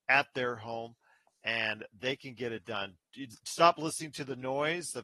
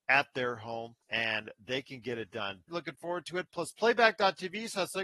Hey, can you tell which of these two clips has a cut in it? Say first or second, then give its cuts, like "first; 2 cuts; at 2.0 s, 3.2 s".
second; 2 cuts; at 1.0 s, 2.7 s